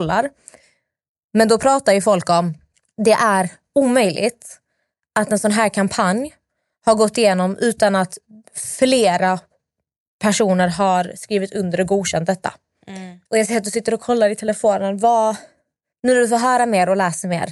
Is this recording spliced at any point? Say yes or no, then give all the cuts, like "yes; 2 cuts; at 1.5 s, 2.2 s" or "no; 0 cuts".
yes; 1 cut; at 13.3 s